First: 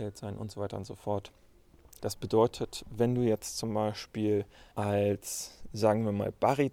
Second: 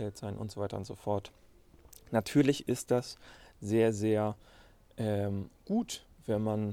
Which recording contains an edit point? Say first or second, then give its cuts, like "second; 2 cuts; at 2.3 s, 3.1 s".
first; 2 cuts; at 2.0 s, 4.7 s